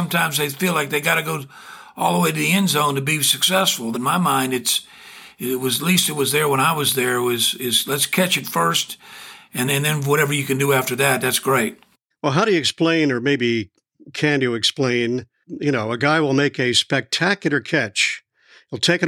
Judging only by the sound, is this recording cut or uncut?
cut